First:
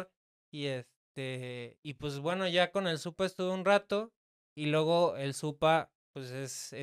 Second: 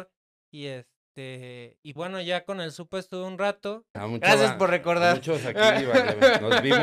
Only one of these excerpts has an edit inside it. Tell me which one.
second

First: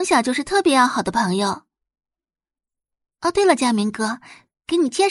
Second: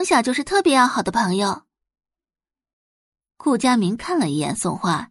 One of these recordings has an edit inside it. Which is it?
first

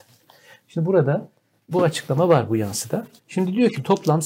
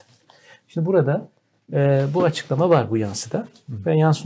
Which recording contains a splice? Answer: first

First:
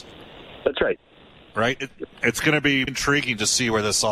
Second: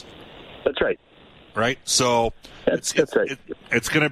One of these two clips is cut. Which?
first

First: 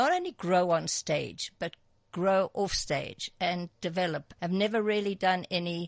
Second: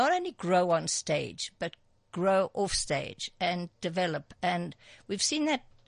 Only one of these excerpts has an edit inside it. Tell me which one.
first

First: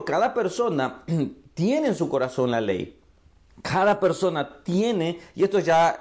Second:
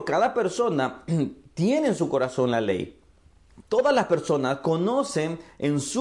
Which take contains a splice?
second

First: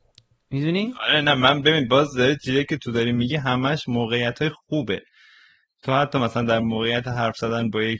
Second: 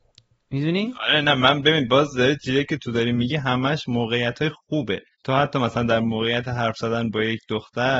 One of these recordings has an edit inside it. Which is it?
second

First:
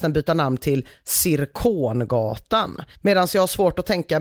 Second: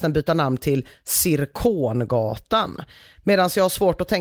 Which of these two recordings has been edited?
first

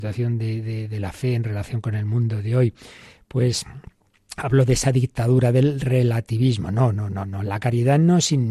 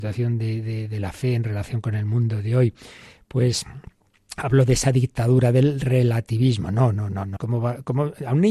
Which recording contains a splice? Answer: second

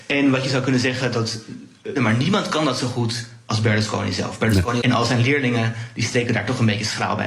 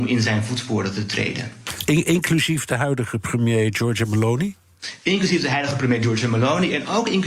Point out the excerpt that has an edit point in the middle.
first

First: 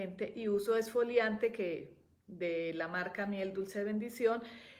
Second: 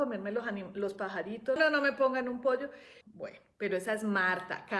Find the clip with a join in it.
second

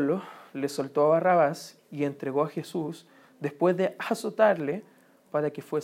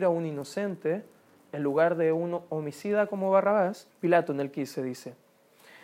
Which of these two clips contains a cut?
second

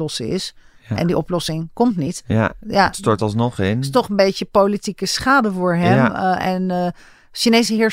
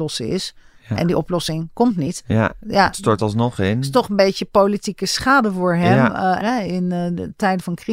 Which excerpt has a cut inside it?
second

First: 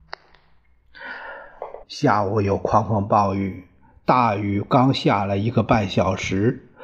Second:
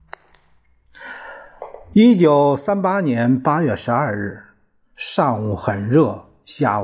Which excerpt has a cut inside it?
first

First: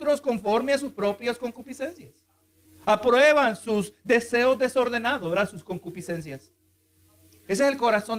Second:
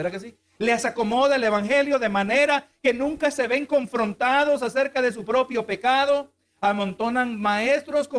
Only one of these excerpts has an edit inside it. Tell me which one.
first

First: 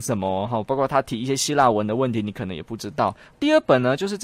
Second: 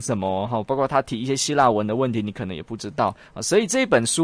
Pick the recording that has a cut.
first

